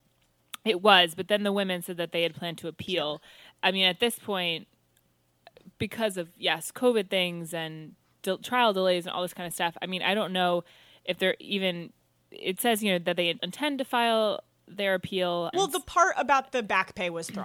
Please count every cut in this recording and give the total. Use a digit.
2